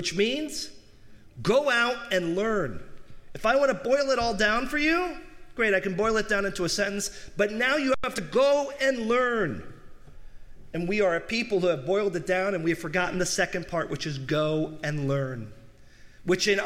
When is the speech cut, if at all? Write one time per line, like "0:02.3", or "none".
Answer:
none